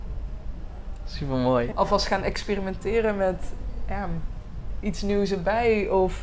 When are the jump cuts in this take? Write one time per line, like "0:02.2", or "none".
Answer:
0:01.7